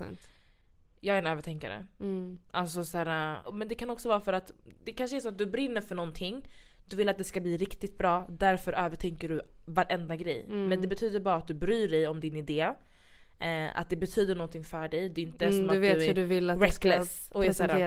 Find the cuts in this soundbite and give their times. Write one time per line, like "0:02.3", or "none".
0:03.4
0:04.7

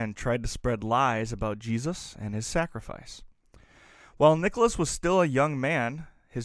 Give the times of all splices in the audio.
none

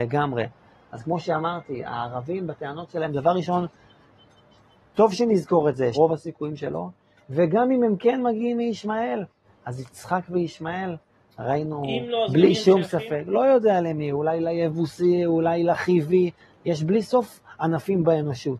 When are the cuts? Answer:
0:05.9

